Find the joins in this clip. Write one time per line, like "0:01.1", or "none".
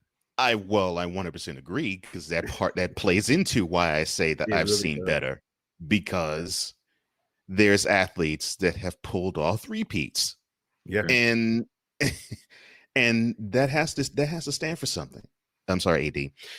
0:15.6